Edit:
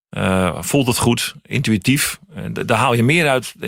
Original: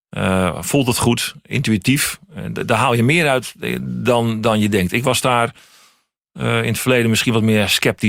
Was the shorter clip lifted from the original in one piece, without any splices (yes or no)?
yes